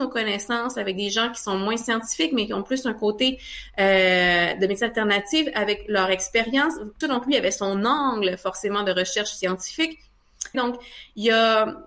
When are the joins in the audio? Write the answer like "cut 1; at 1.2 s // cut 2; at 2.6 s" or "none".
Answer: cut 1; at 7.0 s // cut 2; at 10.5 s